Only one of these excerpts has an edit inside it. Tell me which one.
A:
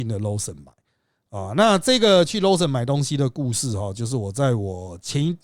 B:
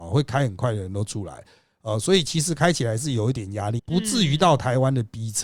B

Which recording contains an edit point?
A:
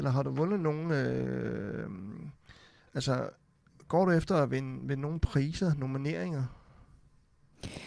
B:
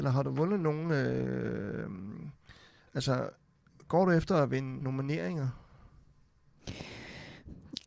B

